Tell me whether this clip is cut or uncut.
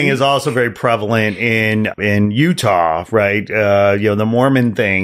uncut